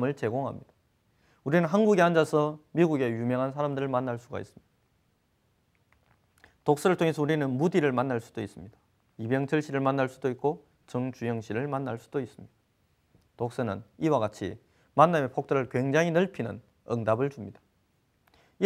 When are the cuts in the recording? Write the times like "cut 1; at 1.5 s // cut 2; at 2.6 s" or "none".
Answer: none